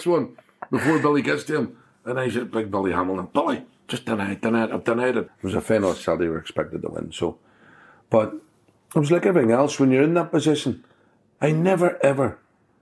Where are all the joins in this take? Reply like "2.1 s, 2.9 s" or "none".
5.3 s